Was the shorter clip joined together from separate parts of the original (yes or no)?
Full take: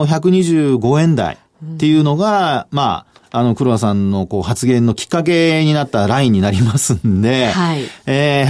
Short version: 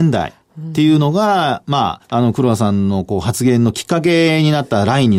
yes